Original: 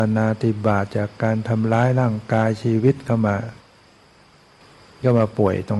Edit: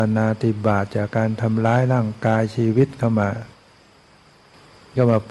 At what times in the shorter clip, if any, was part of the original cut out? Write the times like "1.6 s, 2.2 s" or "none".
1.1 s